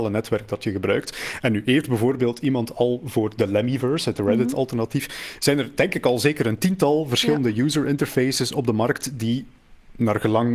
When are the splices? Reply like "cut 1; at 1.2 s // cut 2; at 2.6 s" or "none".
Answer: none